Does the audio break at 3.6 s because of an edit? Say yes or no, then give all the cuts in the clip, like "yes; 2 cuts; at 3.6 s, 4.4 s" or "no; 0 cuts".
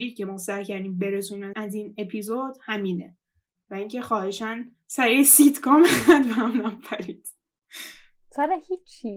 no; 2 cuts; at 1.5 s, 4.8 s